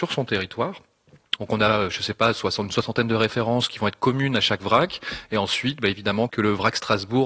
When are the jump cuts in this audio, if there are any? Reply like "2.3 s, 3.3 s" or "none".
1.4 s, 6.3 s